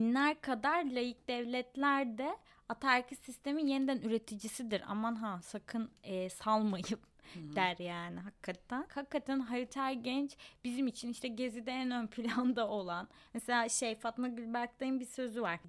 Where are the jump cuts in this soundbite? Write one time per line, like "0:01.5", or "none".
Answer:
0:08.9
0:13.3